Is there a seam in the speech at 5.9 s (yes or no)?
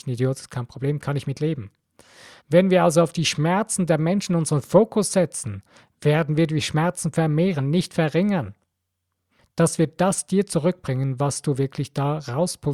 no